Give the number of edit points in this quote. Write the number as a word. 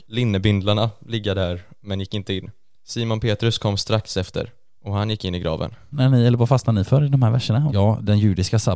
two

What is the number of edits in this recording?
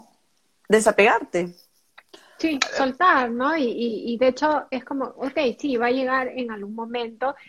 zero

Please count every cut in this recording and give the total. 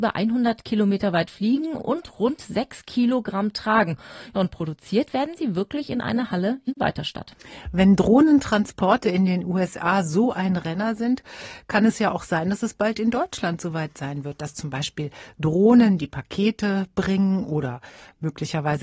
zero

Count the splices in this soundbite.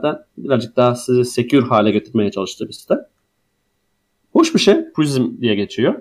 one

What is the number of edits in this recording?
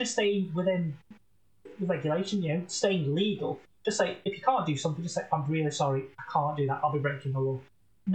zero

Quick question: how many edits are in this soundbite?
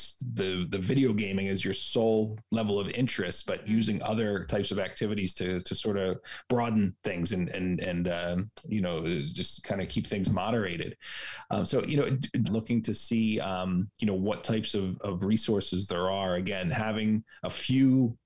one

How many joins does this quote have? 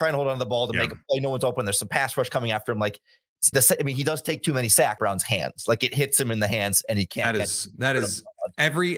two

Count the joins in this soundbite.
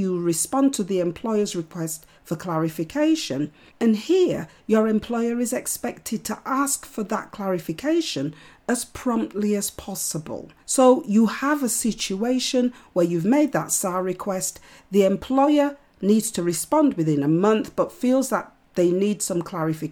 two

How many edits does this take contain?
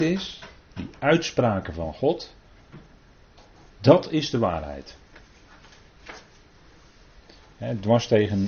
zero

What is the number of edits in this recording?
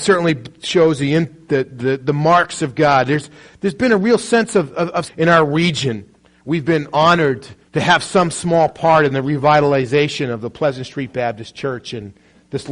one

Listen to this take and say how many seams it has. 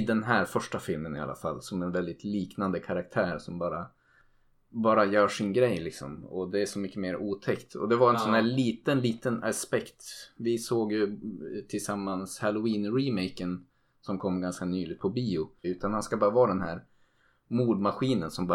one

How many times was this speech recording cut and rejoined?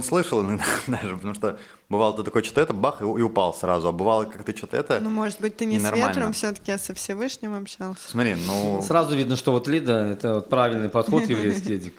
one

